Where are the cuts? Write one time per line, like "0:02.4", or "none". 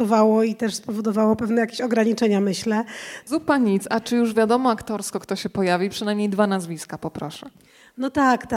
0:03.2